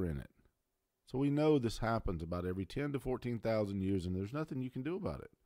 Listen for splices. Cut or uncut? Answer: uncut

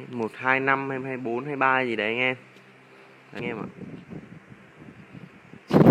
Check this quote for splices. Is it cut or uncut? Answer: cut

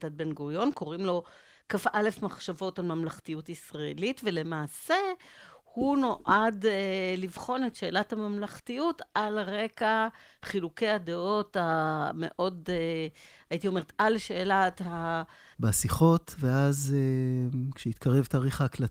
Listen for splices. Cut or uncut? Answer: cut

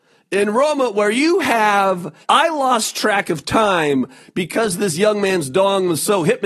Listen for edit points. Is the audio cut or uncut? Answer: cut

